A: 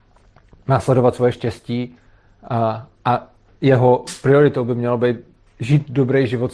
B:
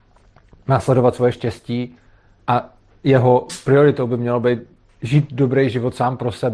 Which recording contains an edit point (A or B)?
B